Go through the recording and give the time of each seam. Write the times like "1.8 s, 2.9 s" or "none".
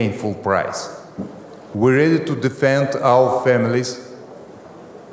1.7 s